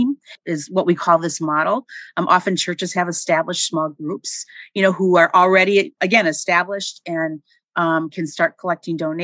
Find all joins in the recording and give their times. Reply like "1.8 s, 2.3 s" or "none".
6.0 s